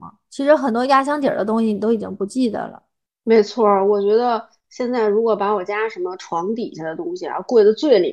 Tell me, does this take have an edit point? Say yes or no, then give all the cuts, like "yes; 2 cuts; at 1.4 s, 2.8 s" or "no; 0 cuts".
no; 0 cuts